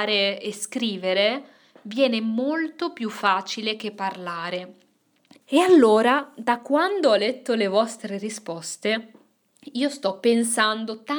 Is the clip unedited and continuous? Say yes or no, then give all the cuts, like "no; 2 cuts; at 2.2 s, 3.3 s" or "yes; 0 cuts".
no; 1 cut; at 5.4 s